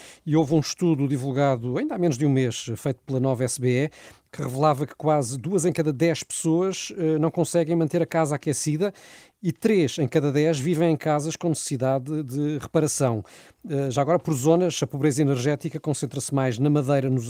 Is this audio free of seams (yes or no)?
yes